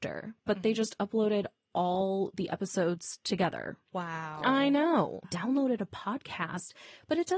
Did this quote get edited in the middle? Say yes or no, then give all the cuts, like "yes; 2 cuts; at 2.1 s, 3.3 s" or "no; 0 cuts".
yes; 2 cuts; at 3.9 s, 5.2 s